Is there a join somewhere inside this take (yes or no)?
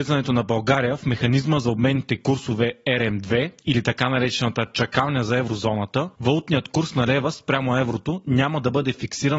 no